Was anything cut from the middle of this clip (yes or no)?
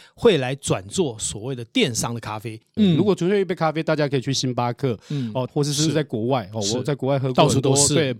yes